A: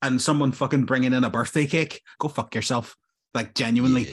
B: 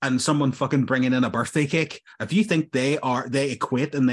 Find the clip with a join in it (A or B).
A